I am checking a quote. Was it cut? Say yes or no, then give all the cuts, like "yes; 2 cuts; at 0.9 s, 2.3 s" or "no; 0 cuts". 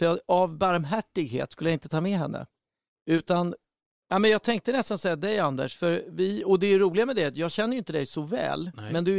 no; 0 cuts